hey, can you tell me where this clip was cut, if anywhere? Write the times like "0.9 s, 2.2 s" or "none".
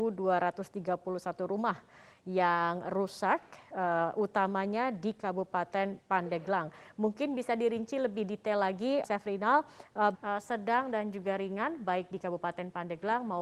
9.0 s, 10.1 s